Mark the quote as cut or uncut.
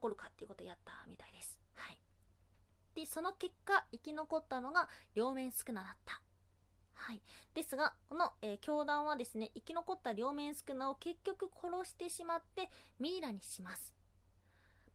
uncut